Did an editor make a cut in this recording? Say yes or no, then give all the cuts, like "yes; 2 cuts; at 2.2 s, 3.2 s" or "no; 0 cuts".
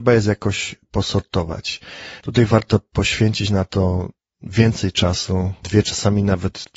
yes; 2 cuts; at 2.2 s, 5.6 s